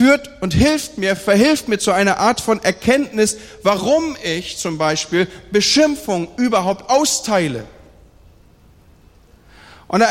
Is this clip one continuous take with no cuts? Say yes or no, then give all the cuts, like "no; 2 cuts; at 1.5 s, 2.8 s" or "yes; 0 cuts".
yes; 0 cuts